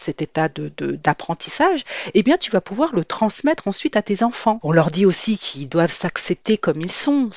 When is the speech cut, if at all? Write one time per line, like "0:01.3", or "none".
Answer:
0:04.6